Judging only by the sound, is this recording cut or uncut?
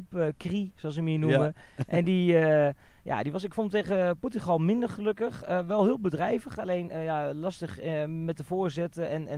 uncut